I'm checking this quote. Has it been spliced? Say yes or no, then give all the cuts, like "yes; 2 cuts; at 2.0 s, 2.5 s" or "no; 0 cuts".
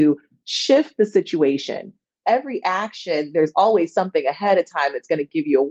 yes; 1 cut; at 2.2 s